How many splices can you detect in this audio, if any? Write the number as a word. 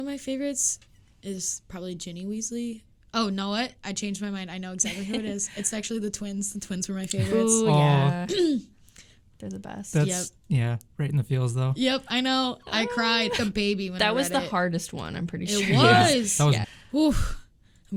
two